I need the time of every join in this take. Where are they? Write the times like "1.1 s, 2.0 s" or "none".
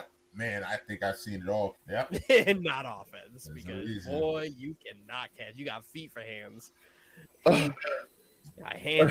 1.7 s